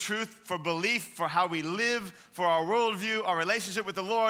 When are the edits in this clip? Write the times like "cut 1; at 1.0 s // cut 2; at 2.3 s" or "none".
none